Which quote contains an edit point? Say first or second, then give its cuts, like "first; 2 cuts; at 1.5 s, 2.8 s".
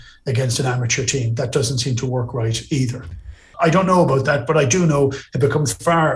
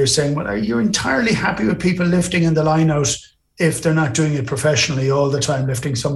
first; 1 cut; at 3.5 s